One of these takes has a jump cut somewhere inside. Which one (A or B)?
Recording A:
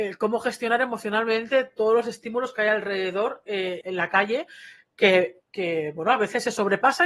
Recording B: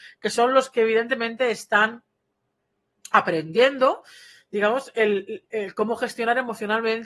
A